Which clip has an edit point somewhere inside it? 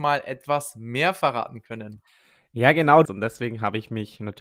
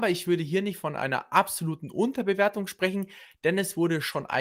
first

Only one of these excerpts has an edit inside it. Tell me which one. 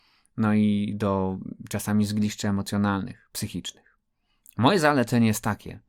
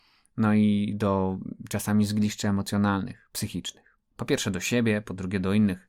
second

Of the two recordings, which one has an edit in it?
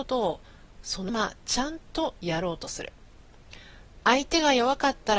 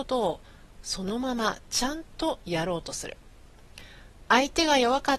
first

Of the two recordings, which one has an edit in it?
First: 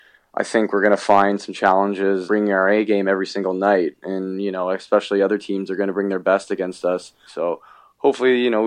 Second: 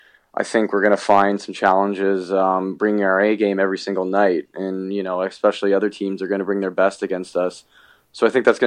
first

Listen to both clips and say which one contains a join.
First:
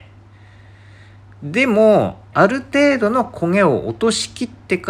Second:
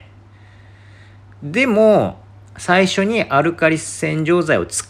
first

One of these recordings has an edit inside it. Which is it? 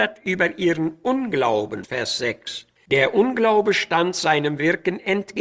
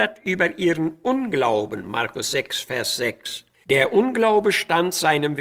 first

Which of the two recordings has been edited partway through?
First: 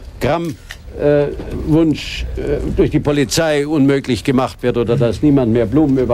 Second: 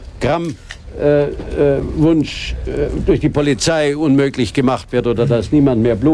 first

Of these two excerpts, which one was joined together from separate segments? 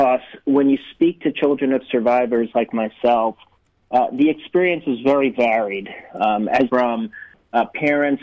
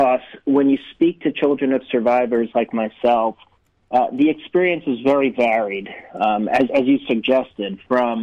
first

